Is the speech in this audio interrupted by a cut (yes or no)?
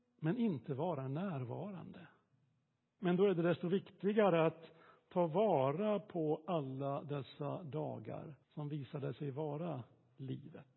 yes